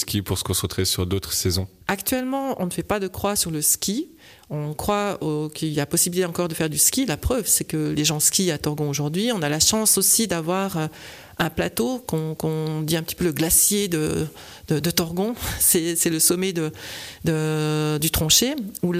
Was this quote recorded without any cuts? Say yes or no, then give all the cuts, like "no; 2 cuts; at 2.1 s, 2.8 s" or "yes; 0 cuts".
yes; 0 cuts